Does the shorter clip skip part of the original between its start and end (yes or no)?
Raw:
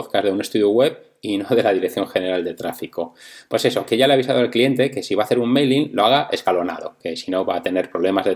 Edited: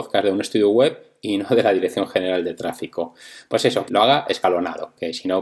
yes